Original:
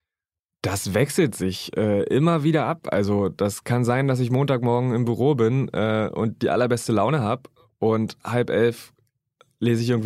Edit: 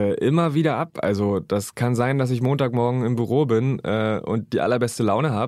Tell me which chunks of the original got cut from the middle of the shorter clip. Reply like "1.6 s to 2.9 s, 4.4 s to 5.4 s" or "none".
none